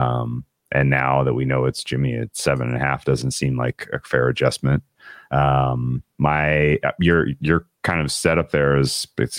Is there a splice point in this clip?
no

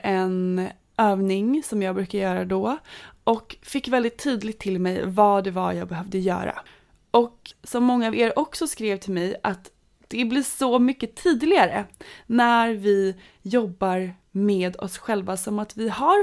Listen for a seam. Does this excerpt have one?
no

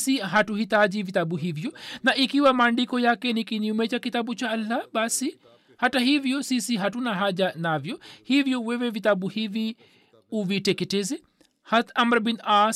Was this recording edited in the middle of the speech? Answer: no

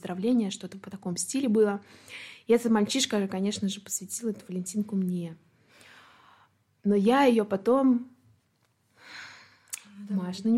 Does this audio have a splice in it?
no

